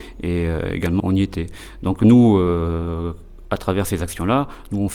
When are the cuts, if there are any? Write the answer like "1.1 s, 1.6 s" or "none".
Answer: 1.0 s